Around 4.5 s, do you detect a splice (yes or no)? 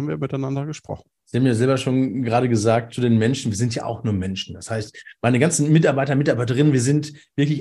no